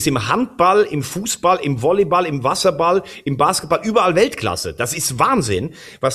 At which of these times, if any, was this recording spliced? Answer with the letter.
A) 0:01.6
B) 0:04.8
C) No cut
C